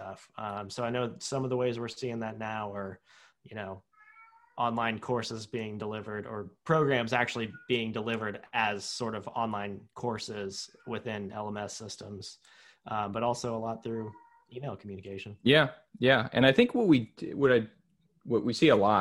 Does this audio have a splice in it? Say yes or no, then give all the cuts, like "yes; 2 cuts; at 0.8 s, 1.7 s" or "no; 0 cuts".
no; 0 cuts